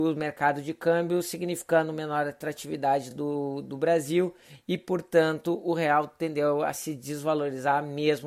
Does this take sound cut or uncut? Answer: uncut